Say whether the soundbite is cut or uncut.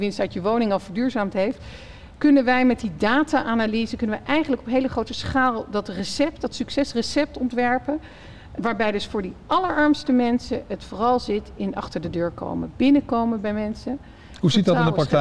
cut